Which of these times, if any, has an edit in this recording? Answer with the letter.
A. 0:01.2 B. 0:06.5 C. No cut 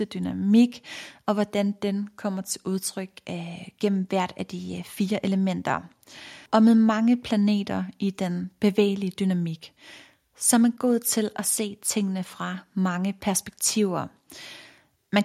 B